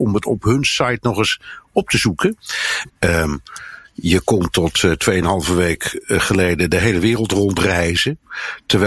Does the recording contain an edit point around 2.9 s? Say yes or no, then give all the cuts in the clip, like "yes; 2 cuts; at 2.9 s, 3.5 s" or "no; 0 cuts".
yes; 1 cut; at 2.9 s